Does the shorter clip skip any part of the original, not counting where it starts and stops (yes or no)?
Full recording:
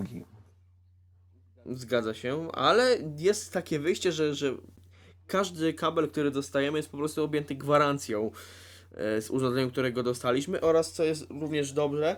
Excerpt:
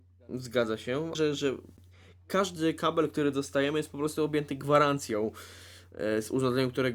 yes